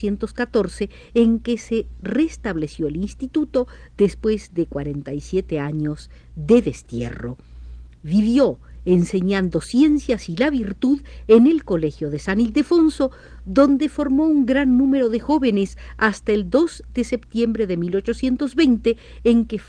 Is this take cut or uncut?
uncut